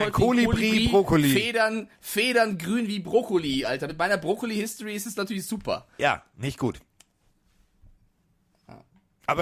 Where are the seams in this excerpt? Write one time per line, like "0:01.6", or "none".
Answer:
none